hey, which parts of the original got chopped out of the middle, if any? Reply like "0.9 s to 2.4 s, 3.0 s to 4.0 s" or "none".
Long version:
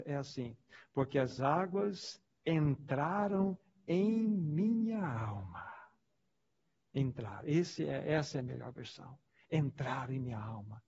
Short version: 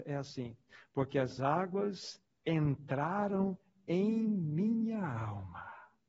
none

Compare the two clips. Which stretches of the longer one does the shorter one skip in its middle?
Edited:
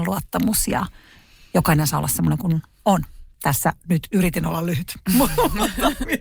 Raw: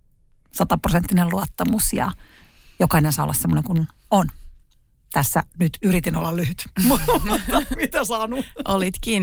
4.6 s to 5.0 s

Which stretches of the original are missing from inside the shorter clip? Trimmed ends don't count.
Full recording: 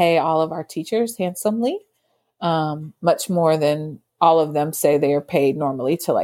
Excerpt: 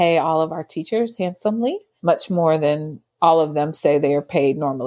2.0 s to 3.0 s

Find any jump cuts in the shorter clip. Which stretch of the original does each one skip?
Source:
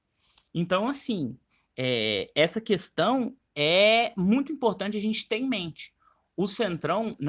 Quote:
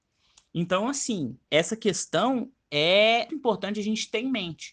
1.5 s to 2.3 s, 4.1 s to 4.5 s

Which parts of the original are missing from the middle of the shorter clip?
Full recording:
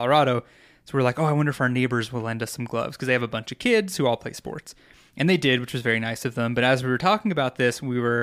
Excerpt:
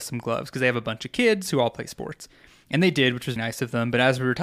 5.8 s to 6.0 s

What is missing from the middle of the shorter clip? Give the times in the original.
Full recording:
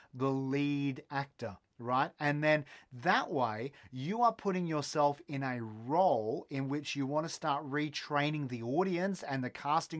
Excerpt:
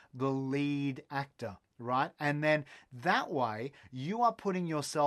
none

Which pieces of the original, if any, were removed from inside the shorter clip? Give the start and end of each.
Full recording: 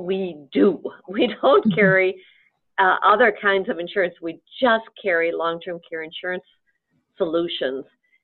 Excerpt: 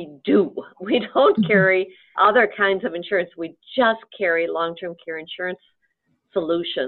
2.4 s to 3.0 s

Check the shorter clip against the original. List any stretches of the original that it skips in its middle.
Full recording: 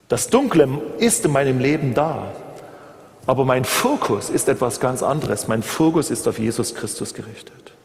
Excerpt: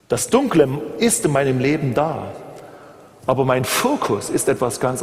none

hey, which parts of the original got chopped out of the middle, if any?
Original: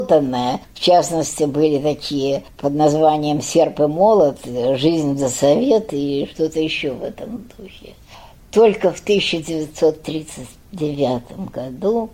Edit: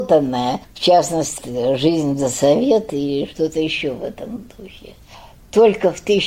1.4 s to 4.4 s

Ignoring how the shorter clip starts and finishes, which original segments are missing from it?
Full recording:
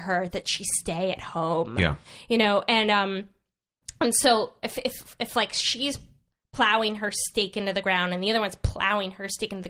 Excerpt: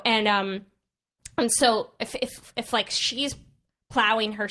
none

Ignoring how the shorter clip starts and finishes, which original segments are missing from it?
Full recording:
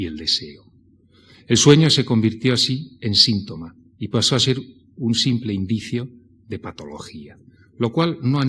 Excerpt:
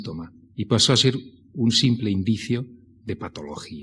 none

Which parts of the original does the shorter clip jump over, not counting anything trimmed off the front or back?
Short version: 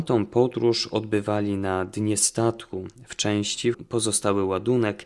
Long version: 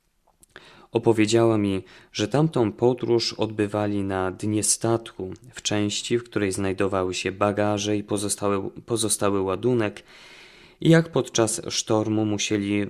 6.2 s to 8.7 s

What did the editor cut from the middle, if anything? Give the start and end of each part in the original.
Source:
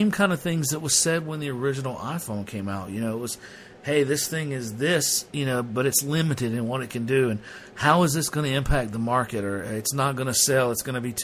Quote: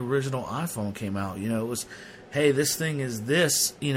none

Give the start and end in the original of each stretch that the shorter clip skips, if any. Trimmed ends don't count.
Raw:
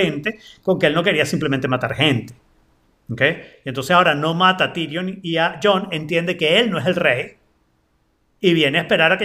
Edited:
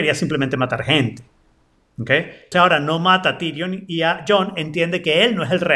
3.6 s to 3.9 s

